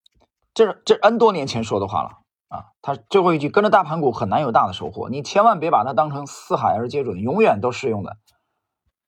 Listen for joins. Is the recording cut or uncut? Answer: uncut